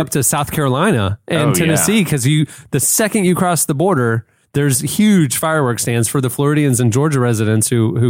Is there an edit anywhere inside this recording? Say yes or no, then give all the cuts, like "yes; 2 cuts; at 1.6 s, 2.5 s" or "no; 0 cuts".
no; 0 cuts